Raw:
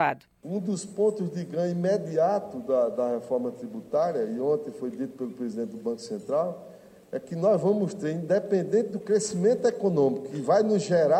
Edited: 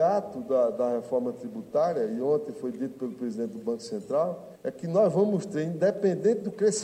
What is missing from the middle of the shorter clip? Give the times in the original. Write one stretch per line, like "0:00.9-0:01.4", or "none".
0:06.7-0:07.0